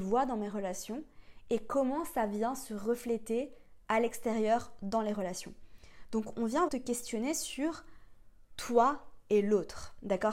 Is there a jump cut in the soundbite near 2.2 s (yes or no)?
no